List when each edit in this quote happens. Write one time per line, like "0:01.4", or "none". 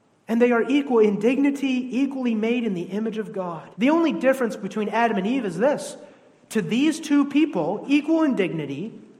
0:03.7
0:07.8